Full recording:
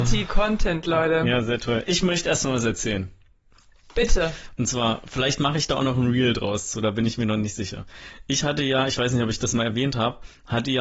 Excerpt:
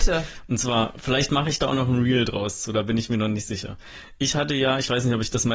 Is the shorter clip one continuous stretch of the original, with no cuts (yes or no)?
yes